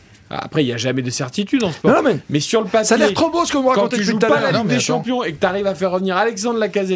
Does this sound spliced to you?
no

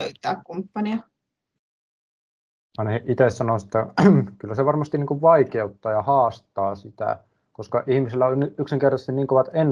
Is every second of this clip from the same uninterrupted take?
yes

